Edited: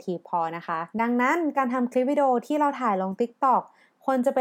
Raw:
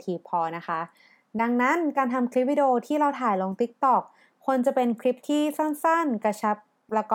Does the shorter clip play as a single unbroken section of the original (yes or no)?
no